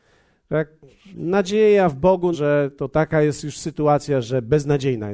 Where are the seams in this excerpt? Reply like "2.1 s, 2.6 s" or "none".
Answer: 2.3 s